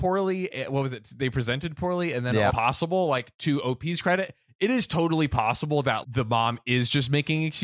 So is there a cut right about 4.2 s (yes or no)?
no